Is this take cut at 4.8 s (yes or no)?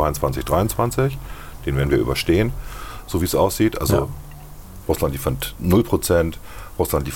yes